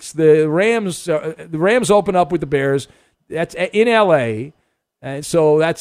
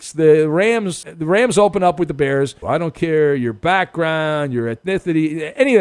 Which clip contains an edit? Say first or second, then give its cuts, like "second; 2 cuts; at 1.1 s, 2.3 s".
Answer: second; 2 cuts; at 1.0 s, 2.6 s